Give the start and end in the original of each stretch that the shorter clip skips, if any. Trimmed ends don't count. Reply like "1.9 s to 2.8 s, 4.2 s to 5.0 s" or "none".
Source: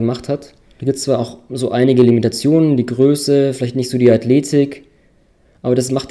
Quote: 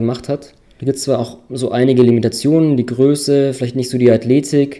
none